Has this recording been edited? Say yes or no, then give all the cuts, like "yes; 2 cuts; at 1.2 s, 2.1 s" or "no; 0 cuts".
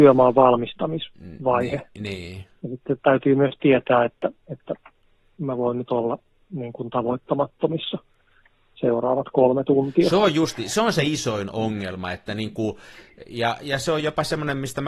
no; 0 cuts